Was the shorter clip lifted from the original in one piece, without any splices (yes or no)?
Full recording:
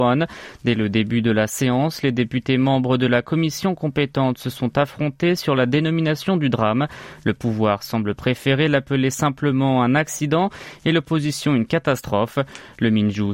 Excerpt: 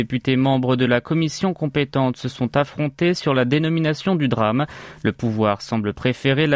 yes